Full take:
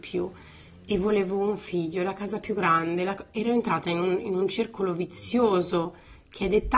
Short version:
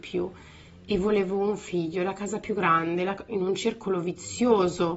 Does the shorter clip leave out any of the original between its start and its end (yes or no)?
yes